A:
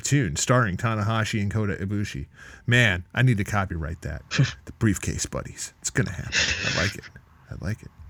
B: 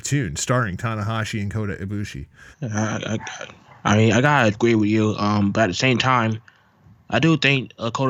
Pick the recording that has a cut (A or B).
B